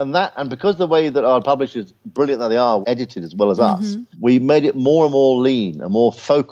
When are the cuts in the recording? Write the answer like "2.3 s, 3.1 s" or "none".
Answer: 2.8 s, 4.1 s